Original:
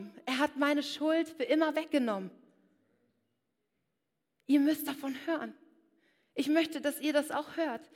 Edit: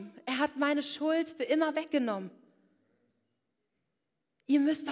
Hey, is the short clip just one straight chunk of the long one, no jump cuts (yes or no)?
yes